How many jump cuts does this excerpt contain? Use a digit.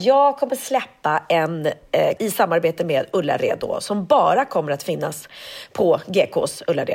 1